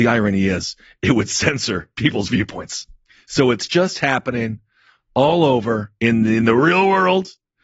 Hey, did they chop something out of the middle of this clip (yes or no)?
yes